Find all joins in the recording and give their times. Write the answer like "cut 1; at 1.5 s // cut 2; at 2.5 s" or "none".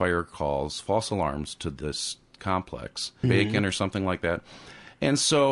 cut 1; at 3.2 s